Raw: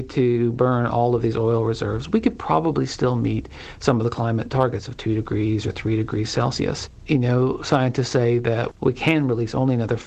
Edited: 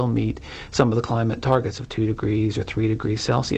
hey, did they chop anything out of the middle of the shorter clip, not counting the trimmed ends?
no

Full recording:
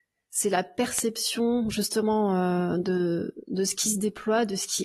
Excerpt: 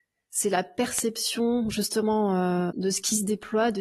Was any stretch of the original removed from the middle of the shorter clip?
yes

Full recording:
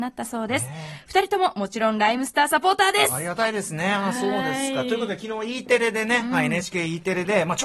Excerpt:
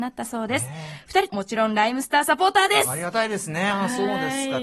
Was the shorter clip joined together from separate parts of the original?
yes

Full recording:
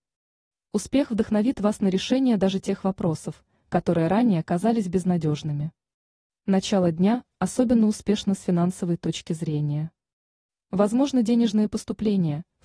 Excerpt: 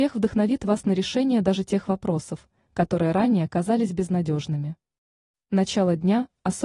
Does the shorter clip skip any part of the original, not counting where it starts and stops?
no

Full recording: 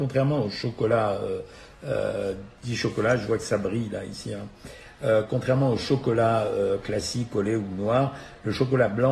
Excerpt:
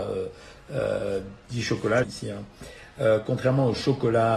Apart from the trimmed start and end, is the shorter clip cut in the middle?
yes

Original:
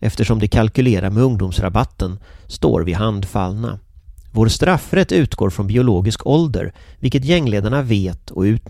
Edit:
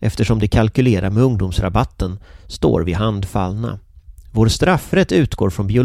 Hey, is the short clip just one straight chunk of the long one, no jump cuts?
yes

